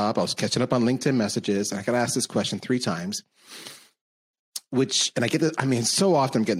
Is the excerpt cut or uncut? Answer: uncut